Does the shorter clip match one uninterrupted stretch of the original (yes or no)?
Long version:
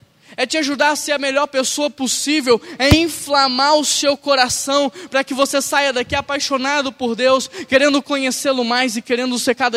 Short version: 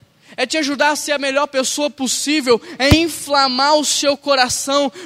yes